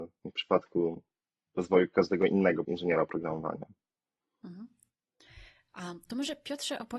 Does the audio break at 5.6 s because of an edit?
no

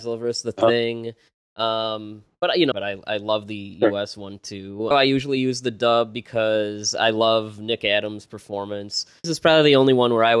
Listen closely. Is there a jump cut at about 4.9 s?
yes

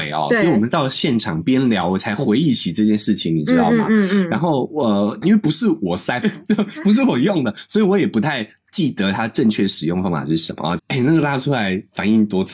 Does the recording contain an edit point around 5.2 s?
yes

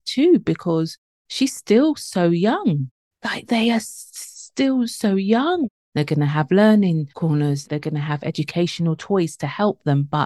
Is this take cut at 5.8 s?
yes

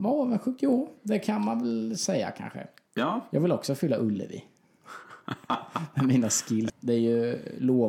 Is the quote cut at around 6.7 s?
yes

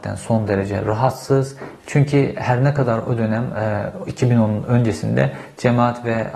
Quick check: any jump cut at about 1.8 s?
yes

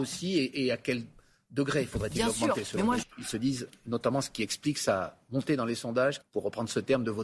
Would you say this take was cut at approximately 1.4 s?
no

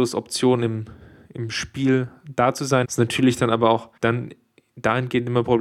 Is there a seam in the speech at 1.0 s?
no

